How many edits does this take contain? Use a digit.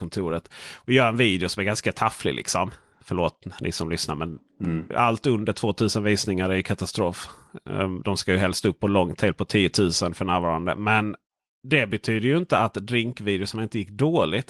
1